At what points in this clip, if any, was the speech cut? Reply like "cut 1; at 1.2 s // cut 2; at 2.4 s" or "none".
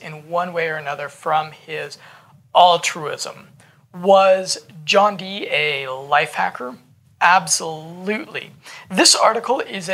none